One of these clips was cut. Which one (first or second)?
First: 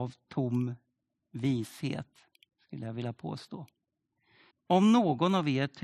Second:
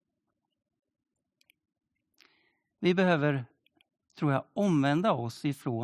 first